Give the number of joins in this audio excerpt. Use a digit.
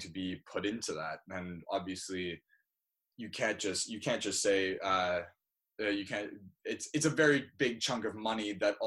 0